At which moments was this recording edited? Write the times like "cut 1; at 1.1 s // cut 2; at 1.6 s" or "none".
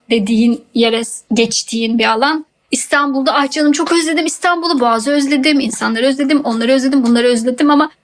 none